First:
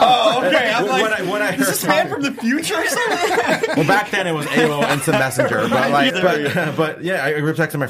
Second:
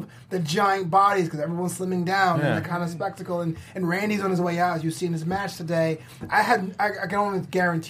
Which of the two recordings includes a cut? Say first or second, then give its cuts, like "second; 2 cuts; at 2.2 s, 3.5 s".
first; 1 cut; at 6.1 s